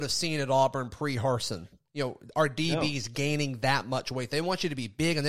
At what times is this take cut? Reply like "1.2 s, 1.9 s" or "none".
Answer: none